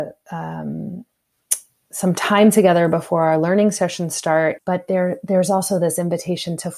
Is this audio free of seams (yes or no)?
no